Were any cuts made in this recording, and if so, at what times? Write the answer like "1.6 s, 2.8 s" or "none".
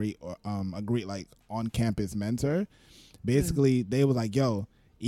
none